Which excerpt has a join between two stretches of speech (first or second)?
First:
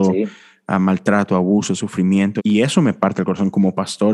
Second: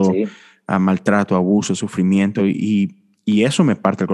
first